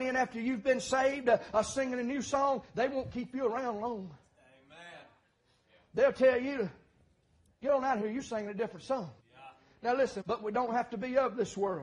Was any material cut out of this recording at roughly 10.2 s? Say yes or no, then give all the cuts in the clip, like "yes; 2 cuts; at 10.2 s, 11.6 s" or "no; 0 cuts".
yes; 2 cuts; at 9.2 s, 10.2 s